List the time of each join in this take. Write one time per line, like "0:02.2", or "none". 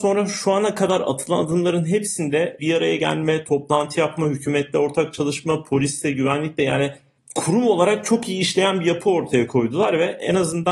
0:02.6

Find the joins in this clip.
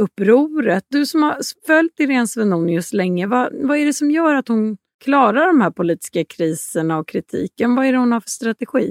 none

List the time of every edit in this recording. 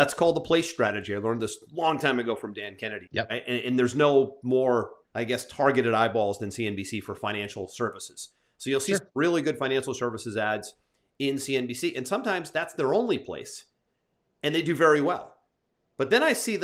0:03.1
0:05.0

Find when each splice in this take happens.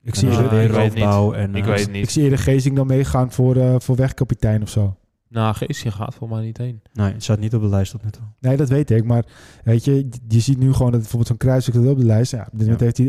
none

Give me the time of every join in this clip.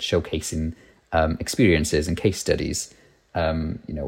none

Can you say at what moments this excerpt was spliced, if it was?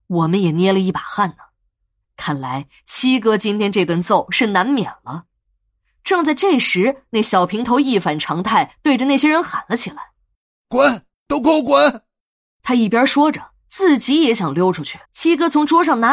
0:15.0

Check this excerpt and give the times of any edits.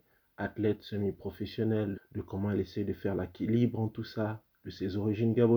0:01.9

